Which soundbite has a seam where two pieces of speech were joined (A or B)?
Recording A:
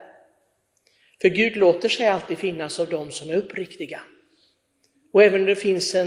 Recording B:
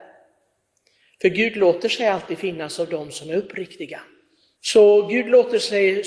B